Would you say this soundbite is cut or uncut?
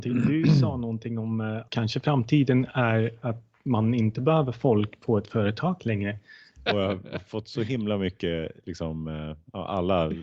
cut